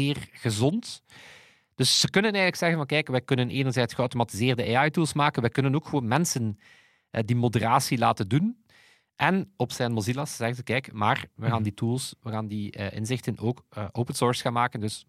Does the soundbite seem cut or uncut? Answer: cut